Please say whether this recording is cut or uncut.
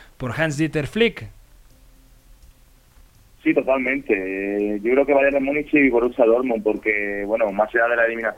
uncut